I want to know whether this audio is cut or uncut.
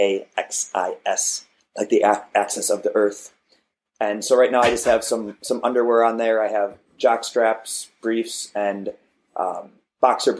cut